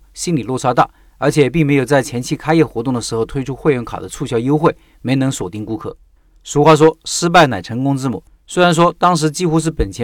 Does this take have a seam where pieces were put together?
no; 0 cuts

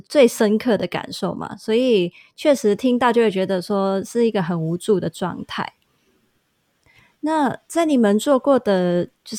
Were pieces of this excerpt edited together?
no; 0 cuts

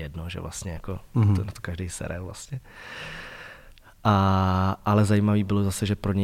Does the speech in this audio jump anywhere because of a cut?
no; 0 cuts

